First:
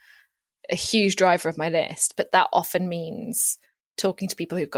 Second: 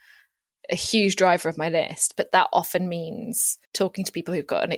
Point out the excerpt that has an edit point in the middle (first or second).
second